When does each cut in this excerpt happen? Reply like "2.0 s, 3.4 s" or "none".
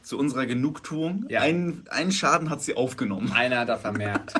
none